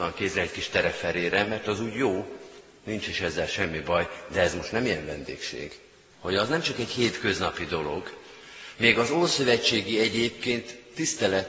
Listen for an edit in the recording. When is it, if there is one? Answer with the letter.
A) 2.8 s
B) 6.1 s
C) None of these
B